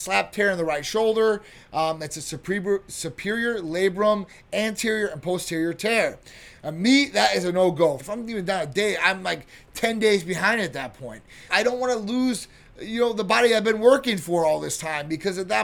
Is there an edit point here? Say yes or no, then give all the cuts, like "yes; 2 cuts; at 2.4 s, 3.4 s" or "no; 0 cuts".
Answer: yes; 3 cuts; at 6.6 s, 8.0 s, 11.5 s